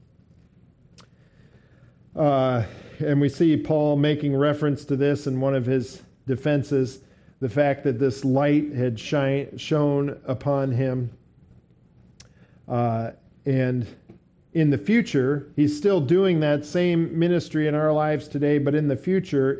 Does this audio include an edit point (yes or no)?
no